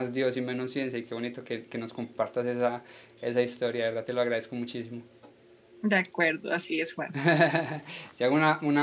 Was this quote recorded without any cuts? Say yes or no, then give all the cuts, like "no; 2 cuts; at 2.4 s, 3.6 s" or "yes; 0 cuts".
yes; 0 cuts